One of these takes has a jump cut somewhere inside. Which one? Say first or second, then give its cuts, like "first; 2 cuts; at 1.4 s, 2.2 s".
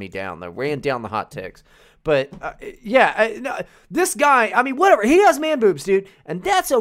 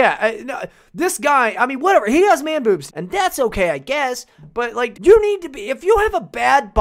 second; 2 cuts; at 2.9 s, 4.9 s